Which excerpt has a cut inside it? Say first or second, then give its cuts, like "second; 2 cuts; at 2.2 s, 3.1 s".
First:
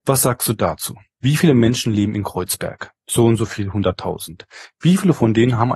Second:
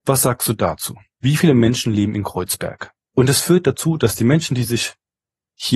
second; 1 cut; at 3.0 s